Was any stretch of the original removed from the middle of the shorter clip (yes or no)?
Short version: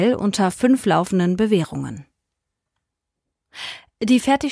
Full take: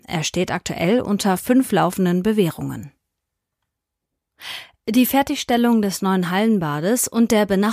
no